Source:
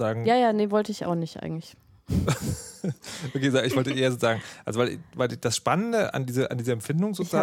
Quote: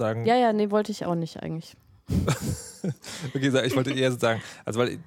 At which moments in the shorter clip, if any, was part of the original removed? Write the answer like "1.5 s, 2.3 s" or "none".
none